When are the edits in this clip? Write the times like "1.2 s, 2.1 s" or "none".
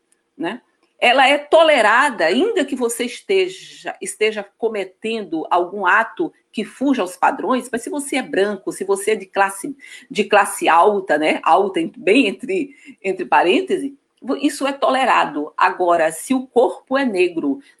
none